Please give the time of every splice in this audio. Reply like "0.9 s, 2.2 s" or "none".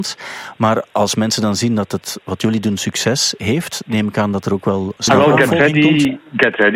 5.0 s